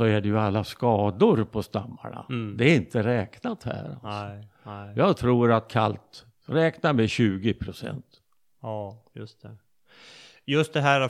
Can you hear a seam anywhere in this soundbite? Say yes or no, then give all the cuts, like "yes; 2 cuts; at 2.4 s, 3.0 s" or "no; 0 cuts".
no; 0 cuts